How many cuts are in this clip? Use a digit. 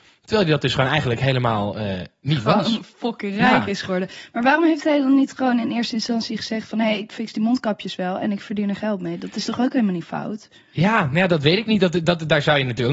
0